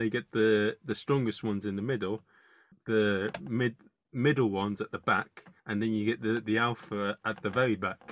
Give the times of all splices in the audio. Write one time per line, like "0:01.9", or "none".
0:02.7
0:05.6